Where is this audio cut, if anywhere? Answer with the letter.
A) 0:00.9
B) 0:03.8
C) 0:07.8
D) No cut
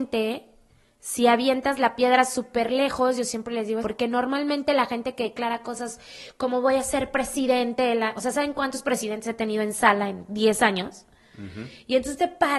B